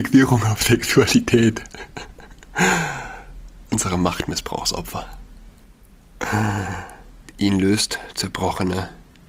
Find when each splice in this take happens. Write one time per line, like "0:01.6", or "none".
0:07.2